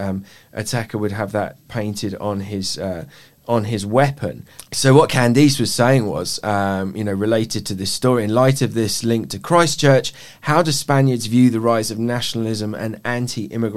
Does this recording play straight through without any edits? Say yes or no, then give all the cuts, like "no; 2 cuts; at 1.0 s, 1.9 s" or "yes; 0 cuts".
yes; 0 cuts